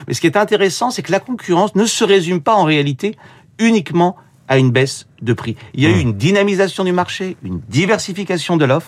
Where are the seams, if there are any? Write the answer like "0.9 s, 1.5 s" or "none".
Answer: none